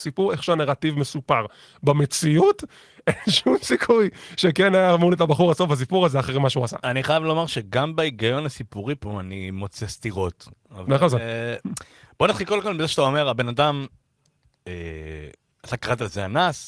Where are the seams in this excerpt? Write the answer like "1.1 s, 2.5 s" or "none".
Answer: none